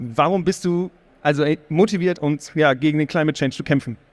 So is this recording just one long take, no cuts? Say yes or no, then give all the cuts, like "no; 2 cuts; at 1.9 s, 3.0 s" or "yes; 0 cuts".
no; 2 cuts; at 1.1 s, 2.2 s